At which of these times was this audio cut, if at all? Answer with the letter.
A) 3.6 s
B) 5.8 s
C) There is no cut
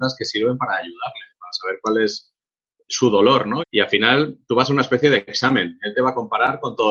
A